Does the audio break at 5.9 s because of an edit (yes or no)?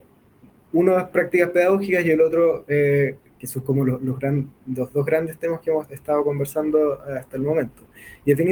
yes